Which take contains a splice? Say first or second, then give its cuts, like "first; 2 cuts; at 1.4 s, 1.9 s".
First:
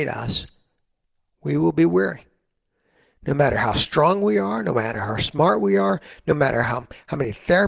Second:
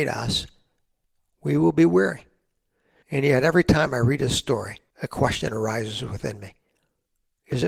second; 2 cuts; at 3.0 s, 4.9 s